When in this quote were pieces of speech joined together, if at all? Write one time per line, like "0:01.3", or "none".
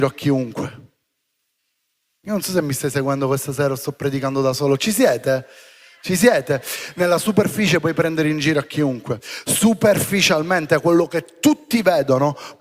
none